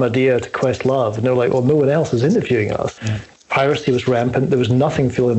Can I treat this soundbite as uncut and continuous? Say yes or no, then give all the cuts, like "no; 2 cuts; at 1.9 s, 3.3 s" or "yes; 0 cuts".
no; 1 cut; at 3.0 s